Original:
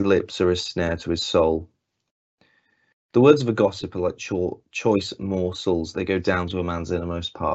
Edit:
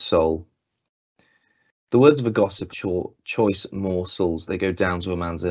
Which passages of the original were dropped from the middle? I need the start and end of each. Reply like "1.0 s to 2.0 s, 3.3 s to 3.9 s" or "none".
3.9 s to 4.2 s